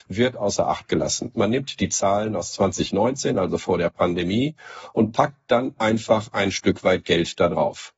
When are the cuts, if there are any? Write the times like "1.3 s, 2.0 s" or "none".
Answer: 1.3 s